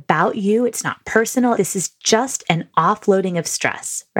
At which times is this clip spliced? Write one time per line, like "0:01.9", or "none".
0:01.6